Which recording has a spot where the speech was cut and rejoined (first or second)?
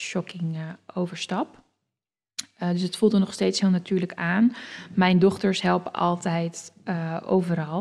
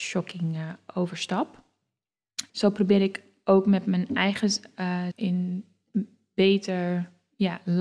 second